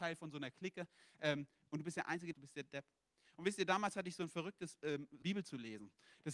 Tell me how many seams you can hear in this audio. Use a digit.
2